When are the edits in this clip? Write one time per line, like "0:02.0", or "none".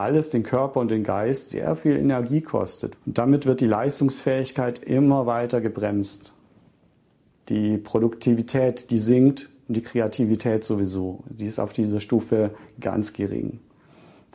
0:02.9